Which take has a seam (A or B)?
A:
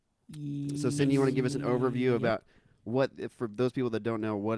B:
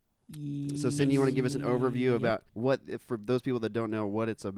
B